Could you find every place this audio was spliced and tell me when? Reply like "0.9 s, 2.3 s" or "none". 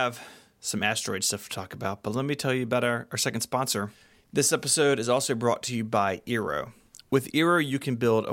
none

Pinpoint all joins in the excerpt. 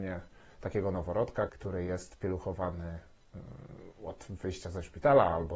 1.5 s

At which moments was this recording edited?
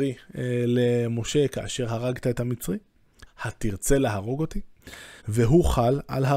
3.3 s, 5.2 s

